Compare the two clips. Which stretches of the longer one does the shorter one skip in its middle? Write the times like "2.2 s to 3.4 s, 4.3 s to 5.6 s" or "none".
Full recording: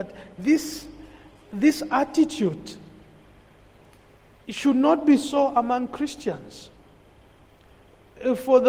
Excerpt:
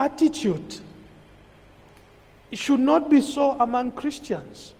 none